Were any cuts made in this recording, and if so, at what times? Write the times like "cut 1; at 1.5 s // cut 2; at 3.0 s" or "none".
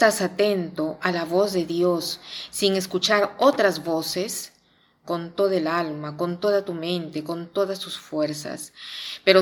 cut 1; at 5.0 s